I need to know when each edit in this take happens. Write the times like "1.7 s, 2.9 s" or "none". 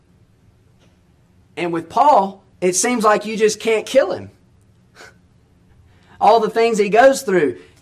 2.5 s